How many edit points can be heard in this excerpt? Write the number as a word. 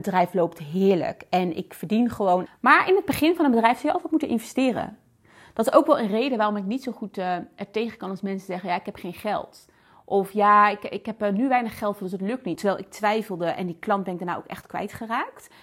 two